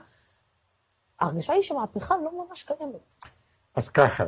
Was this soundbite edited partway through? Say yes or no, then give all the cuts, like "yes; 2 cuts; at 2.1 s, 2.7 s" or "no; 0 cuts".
no; 0 cuts